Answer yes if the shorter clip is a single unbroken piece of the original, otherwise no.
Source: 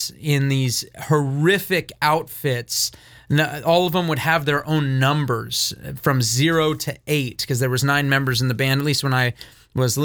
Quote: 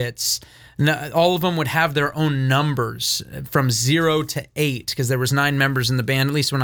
yes